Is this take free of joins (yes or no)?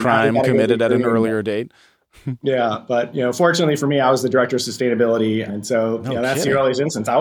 no